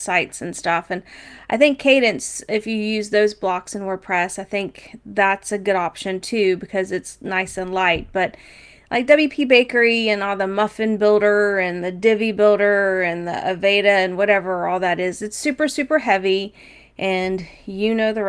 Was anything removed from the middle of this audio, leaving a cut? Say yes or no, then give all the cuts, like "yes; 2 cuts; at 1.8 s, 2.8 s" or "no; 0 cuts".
no; 0 cuts